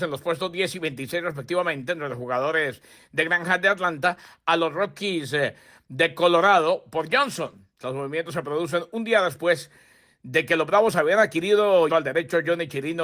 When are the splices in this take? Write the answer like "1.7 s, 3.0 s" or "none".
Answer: 7.8 s, 11.9 s